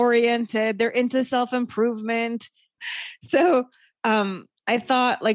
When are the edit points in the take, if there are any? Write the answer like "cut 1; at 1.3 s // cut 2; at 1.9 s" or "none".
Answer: cut 1; at 2.8 s